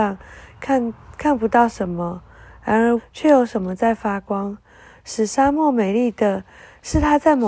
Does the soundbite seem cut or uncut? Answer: cut